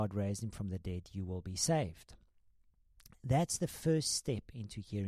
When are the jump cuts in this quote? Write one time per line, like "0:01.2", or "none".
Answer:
none